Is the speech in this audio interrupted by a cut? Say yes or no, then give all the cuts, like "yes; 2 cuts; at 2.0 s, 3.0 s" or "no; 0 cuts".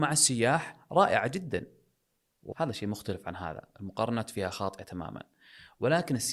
yes; 1 cut; at 2.5 s